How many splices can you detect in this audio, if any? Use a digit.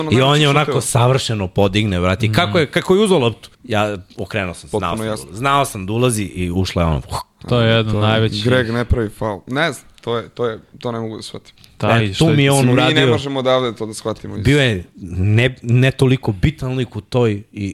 1